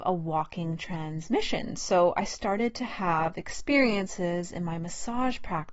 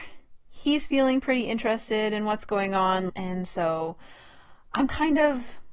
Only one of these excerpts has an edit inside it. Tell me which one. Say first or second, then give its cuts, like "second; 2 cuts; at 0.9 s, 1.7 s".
second; 1 cut; at 3.1 s